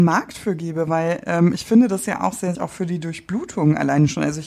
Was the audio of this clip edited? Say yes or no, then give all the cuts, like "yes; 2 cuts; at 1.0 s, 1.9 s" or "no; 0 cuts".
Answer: yes; 1 cut; at 2.5 s